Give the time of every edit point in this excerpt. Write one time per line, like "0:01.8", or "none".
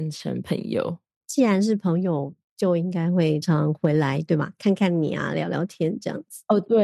0:03.4